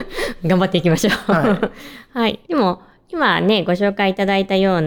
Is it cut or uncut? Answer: cut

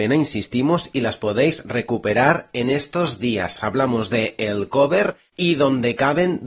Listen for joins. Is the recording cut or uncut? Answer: uncut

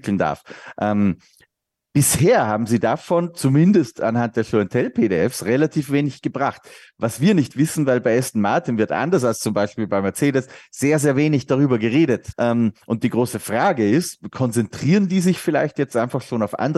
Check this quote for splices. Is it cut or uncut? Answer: cut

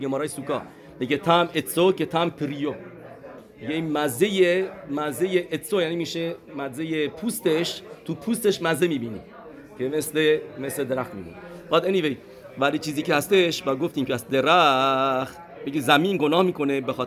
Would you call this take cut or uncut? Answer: uncut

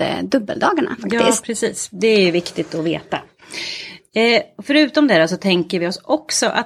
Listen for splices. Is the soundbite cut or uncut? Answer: uncut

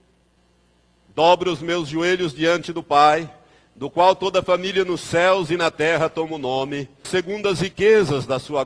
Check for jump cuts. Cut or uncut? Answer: cut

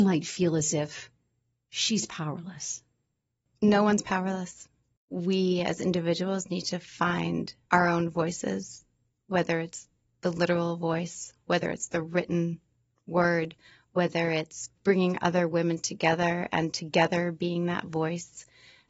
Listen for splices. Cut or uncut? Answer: uncut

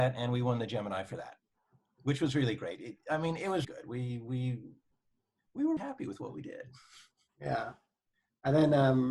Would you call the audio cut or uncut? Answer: cut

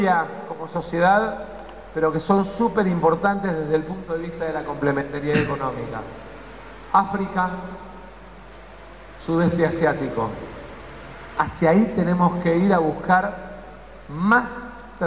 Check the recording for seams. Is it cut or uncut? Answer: cut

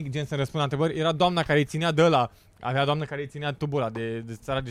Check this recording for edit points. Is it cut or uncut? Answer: uncut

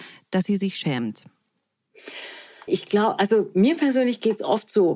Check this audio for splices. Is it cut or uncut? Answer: cut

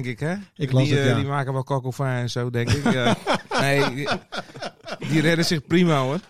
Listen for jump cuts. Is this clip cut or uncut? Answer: uncut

